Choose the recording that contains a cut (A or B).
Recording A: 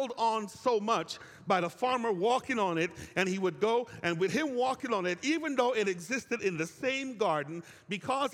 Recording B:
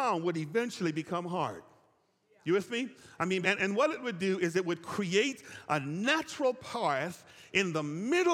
B